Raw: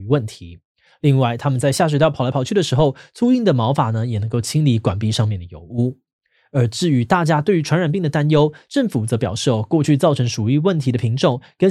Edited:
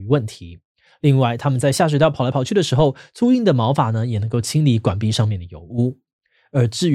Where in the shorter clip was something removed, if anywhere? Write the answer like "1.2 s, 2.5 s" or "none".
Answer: none